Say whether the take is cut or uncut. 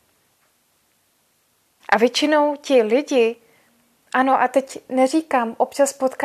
cut